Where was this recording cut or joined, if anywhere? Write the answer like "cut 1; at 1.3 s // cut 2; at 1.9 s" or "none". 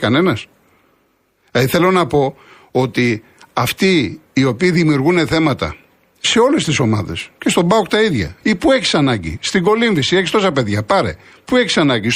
cut 1; at 8.4 s